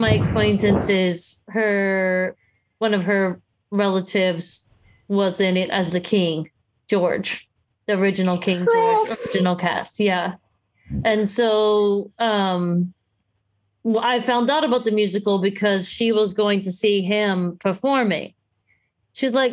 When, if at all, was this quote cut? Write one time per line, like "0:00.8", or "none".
none